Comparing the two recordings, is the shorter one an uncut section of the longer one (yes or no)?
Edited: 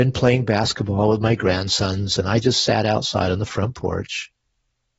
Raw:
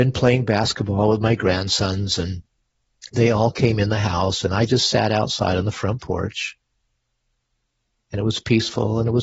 no